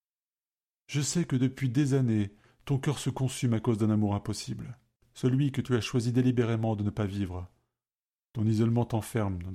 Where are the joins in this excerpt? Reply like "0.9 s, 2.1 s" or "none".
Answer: none